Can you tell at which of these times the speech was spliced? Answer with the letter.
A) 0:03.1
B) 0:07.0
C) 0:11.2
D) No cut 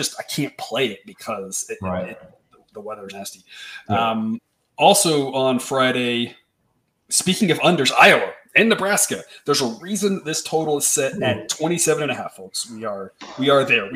A